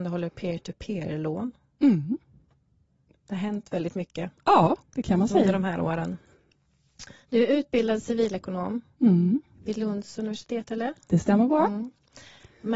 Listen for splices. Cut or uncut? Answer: uncut